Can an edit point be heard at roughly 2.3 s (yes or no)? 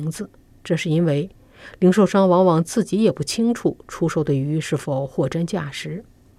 no